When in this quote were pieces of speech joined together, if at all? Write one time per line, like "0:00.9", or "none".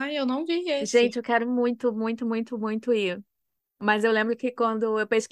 none